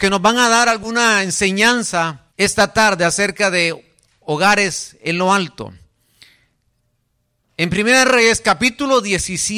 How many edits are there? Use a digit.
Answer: 1